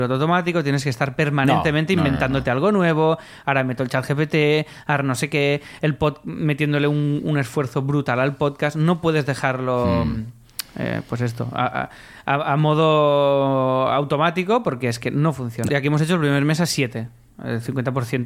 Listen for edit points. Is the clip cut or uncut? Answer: cut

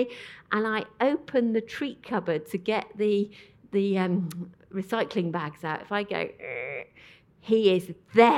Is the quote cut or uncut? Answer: uncut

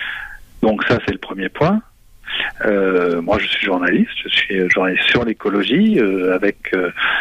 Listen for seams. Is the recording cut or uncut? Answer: uncut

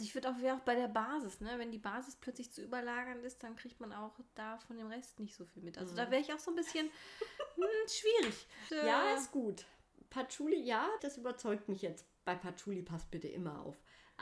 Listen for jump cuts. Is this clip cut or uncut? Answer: cut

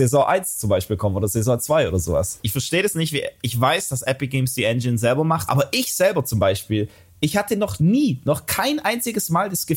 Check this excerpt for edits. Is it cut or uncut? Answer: cut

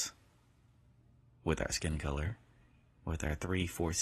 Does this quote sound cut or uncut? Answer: uncut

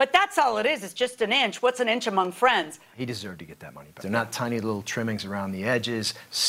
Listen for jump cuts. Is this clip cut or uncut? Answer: cut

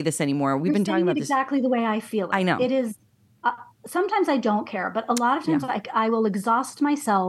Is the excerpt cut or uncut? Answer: uncut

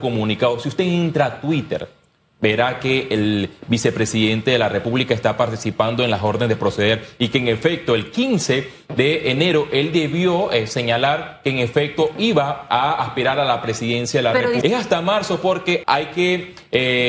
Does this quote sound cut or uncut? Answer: cut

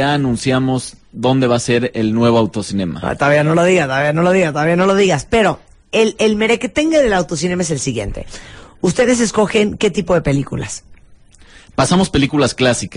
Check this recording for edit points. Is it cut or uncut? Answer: uncut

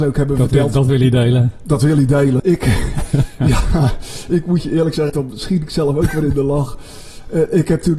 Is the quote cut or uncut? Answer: cut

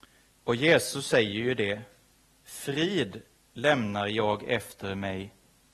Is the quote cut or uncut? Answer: uncut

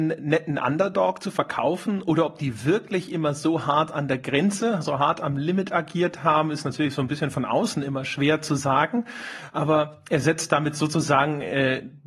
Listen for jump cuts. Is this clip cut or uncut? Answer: uncut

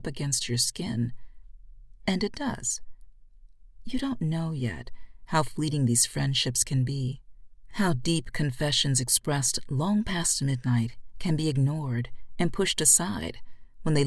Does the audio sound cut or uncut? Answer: cut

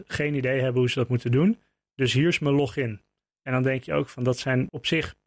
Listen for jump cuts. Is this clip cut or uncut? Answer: cut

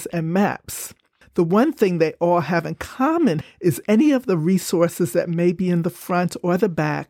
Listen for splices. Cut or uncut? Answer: cut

